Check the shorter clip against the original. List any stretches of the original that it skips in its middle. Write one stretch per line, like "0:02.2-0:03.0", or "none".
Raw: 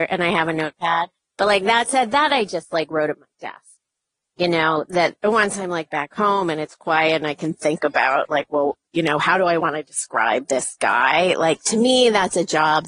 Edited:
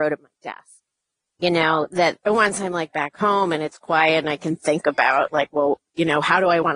none